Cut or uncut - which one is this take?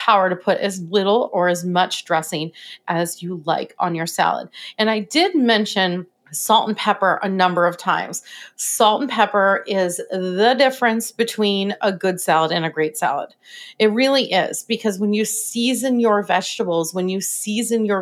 uncut